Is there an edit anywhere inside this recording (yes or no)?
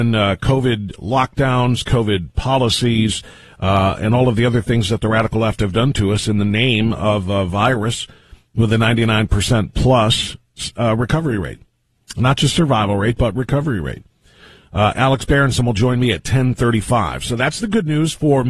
no